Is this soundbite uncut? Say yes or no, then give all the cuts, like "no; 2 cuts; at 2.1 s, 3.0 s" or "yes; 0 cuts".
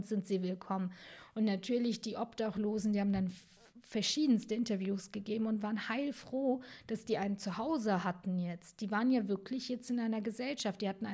yes; 0 cuts